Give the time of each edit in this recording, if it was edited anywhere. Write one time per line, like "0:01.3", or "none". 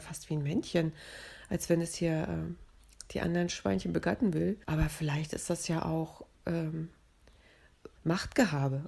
0:04.6
0:06.3
0:08.0

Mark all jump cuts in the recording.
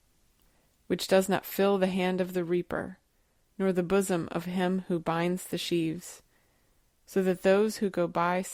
none

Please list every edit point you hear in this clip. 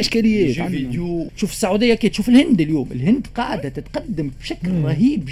0:01.3

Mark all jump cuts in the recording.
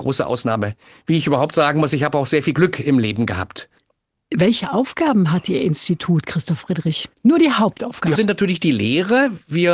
0:07.1
0:08.1

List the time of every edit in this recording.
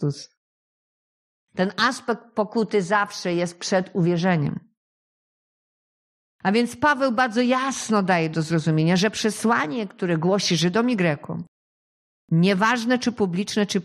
none

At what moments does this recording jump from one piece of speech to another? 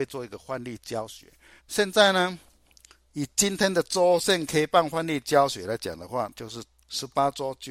0:01.6
0:06.3

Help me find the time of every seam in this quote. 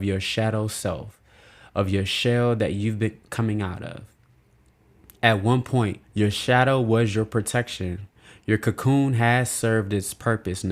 0:06.0

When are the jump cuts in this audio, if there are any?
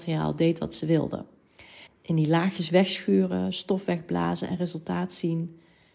0:01.9
0:03.5

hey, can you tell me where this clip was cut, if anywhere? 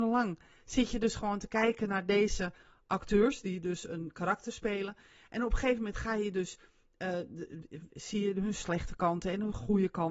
none

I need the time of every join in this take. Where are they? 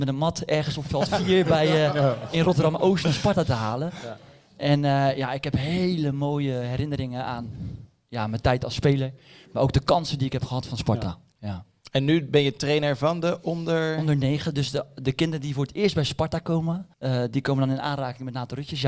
0:11.3
0:16.9

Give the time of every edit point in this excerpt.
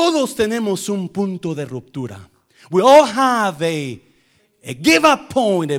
none

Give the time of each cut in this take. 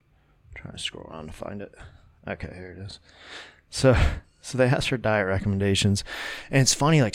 none

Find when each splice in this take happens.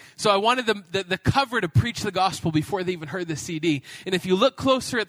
none

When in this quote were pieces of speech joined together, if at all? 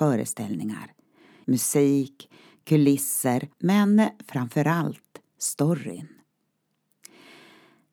0:01.4
0:03.5

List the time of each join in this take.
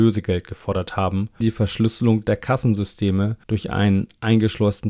0:01.4
0:03.4

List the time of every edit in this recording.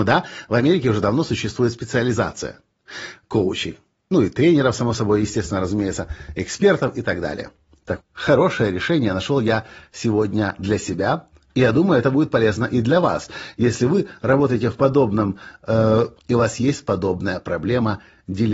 0:08.0
0:16.2

